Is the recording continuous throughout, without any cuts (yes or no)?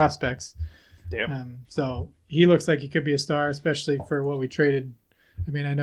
yes